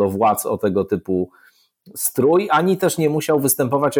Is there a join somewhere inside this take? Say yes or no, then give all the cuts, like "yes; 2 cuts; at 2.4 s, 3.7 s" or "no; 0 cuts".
no; 0 cuts